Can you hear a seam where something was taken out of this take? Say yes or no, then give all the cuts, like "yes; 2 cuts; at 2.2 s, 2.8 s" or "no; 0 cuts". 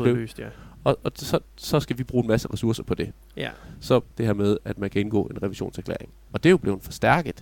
yes; 2 cuts; at 1.0 s, 4.1 s